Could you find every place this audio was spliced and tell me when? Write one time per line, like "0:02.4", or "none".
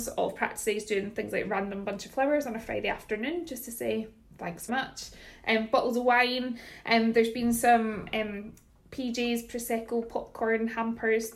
0:04.7